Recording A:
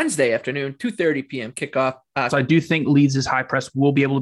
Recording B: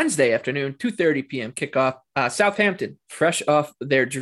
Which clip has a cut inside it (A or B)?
A